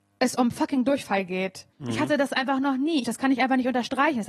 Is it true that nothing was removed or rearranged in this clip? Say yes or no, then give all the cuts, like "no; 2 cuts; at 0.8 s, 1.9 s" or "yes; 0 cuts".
no; 2 cuts; at 1.7 s, 3.0 s